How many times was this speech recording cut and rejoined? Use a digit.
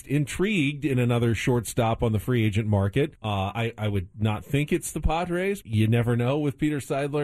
2